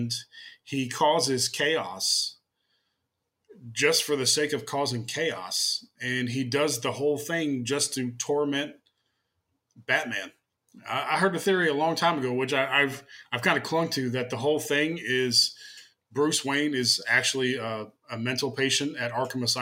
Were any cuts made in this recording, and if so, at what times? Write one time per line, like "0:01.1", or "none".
none